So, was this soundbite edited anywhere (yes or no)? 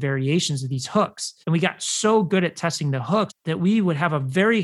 yes